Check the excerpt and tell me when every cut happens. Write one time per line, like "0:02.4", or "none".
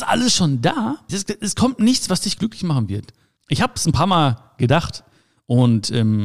0:01.1
0:03.4